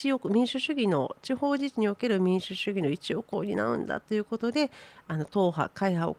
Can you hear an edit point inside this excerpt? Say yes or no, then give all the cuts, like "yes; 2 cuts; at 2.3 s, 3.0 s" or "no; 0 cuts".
no; 0 cuts